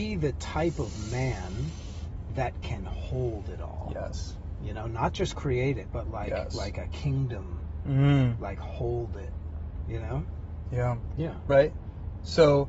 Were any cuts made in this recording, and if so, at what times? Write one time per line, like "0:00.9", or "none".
0:11.1

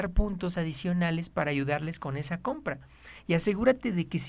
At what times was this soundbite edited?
none

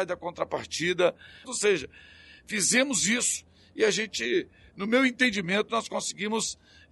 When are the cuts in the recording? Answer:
0:01.4

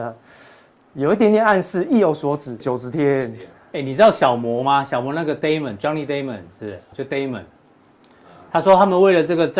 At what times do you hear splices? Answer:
0:02.6
0:06.9

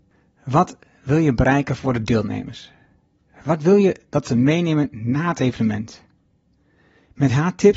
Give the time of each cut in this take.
none

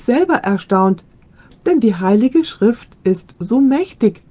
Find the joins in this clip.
none

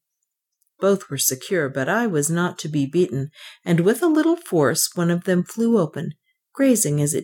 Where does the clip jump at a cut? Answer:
none

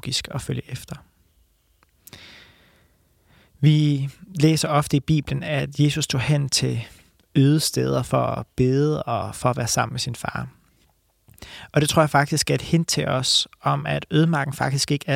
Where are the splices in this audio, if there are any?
none

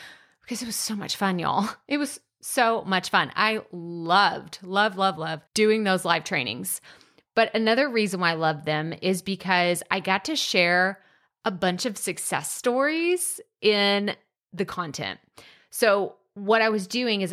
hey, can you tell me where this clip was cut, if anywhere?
0:05.5

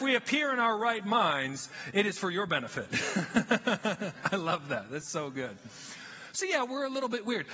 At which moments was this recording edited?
none

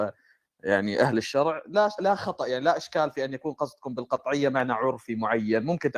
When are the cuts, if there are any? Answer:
0:02.0

